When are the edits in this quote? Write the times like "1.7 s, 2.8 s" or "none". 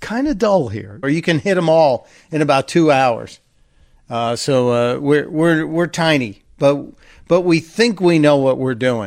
1.0 s